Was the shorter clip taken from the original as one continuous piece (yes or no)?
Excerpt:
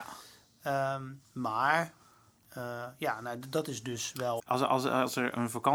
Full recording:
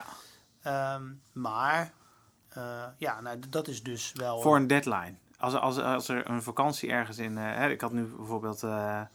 no